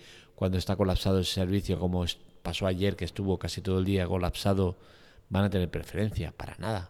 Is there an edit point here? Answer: no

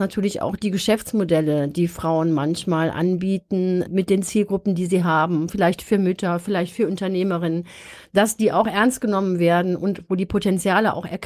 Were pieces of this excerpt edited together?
yes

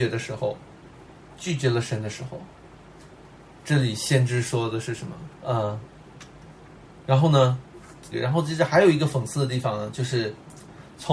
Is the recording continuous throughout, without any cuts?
no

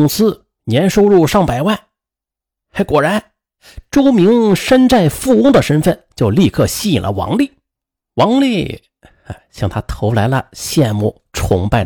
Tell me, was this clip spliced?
no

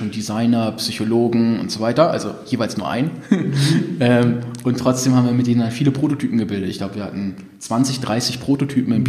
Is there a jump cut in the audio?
no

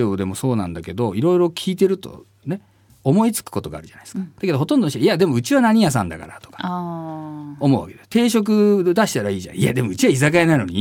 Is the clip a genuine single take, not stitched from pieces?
yes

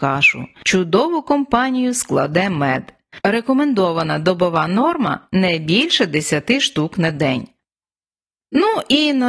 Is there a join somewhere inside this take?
yes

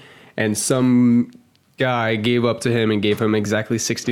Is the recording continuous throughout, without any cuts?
yes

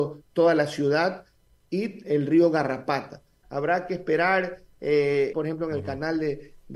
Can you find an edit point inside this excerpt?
yes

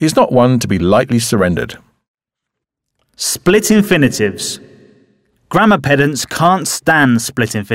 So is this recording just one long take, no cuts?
yes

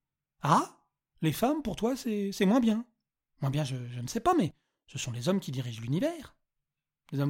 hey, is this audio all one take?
no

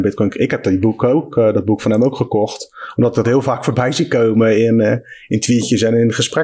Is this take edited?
no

